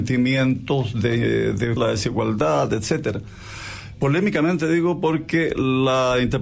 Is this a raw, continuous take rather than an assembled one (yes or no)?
no